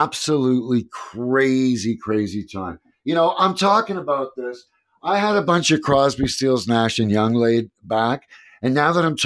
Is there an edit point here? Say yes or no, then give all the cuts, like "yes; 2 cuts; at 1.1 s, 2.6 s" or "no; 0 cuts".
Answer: no; 0 cuts